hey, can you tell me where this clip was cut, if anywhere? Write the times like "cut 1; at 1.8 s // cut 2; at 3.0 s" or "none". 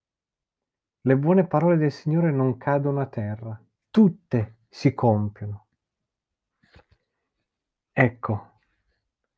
cut 1; at 3.8 s